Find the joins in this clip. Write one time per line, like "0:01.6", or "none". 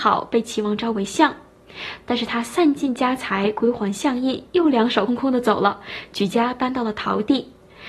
0:05.1